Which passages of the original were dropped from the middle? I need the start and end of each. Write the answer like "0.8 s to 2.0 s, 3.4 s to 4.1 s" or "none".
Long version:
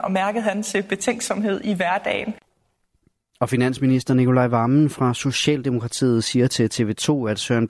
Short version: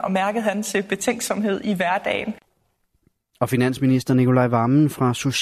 none